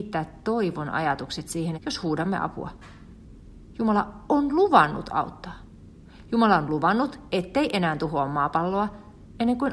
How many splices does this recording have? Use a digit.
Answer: 1